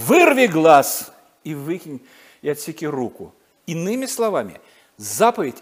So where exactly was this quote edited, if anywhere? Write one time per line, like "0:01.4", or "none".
0:03.6